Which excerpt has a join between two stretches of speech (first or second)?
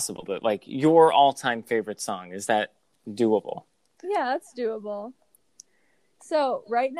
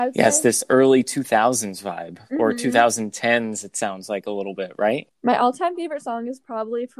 second